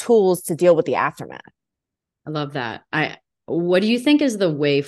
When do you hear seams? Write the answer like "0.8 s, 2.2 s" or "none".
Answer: none